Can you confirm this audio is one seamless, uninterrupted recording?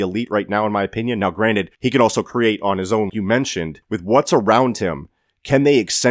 no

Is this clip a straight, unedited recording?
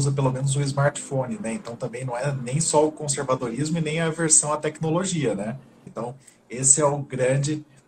no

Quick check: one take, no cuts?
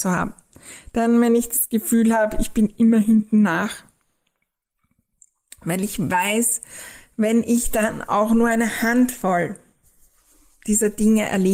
yes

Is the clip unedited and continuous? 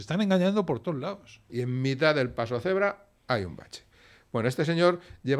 no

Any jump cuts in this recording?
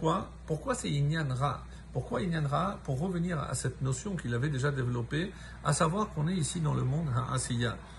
no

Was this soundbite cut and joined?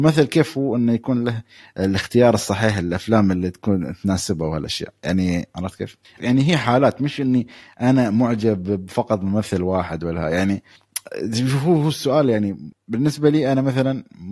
yes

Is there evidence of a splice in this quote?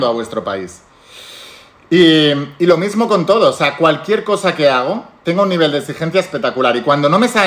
no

